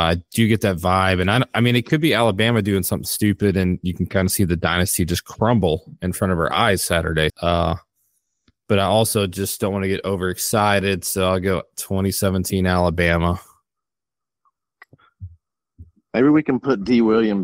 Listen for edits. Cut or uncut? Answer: cut